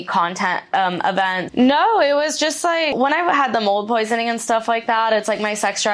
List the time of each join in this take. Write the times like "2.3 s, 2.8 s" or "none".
1.5 s